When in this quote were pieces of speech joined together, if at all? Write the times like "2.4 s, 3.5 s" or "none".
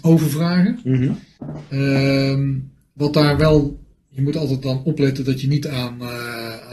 none